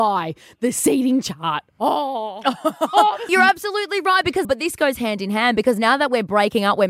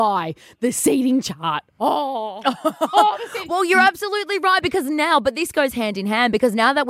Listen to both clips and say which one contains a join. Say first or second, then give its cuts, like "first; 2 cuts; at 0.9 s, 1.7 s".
first; 2 cuts; at 3.3 s, 4.4 s